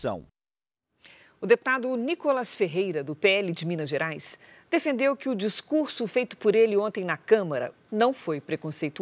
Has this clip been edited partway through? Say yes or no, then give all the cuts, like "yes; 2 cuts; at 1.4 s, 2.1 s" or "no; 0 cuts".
yes; 1 cut; at 7.7 s